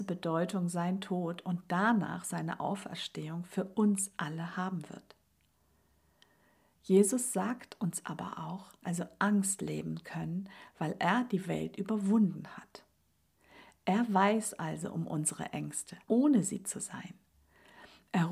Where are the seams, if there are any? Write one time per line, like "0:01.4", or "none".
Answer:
0:08.8
0:16.0